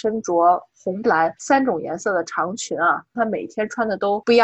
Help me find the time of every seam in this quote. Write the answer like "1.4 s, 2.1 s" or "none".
1.0 s, 3.1 s